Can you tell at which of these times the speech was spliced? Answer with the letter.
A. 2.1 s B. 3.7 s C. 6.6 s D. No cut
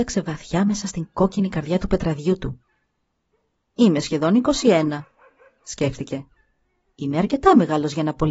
D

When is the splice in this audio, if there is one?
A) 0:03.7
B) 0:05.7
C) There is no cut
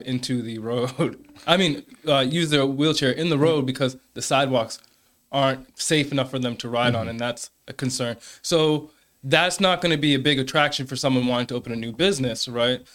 B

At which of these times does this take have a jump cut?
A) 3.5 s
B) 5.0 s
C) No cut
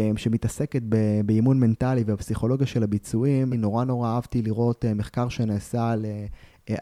A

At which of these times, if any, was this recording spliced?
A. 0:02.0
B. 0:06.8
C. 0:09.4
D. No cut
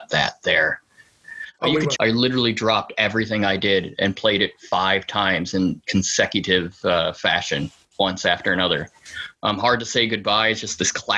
A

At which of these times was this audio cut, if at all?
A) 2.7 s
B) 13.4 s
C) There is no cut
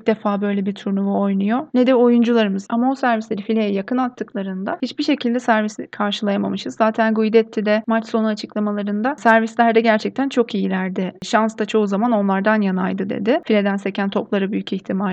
A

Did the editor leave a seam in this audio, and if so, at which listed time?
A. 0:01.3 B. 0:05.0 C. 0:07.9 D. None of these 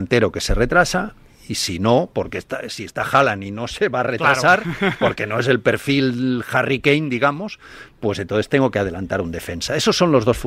D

